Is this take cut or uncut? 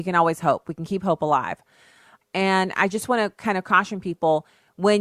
cut